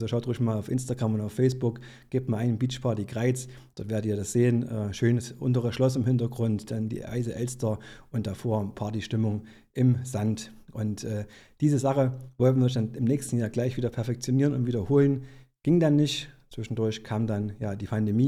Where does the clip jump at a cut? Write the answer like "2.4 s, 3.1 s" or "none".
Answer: none